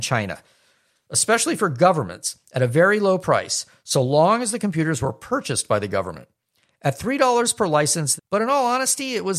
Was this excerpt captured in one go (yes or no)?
no